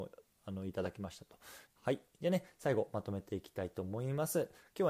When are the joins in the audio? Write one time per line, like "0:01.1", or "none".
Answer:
0:01.7